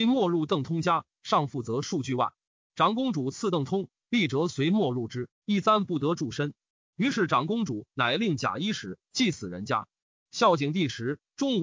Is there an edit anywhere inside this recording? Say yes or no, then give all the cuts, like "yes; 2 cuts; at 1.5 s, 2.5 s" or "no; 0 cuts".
yes; 1 cut; at 9.0 s